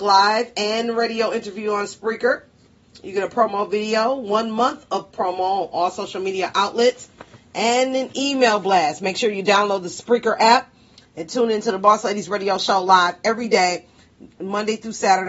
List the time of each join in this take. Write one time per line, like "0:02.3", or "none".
none